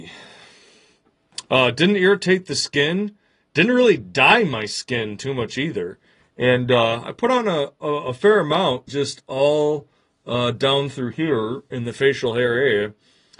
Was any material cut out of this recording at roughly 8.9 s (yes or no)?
yes